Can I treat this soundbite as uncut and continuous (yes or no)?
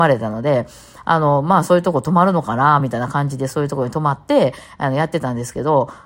yes